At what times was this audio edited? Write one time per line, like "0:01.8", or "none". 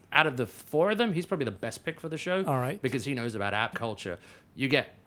0:03.7